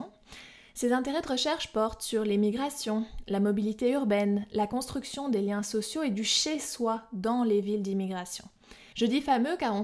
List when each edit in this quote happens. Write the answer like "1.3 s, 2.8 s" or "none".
8.9 s